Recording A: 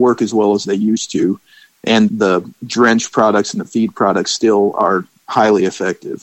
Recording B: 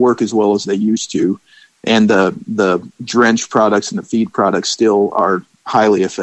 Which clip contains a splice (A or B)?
A